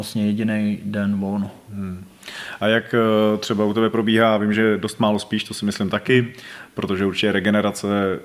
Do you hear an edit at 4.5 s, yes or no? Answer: yes